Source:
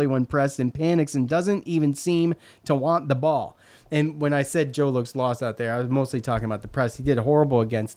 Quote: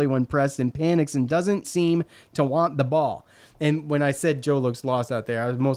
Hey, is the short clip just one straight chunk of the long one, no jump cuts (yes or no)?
no